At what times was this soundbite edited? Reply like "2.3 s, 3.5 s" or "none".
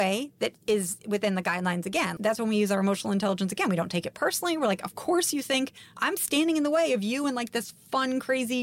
2.2 s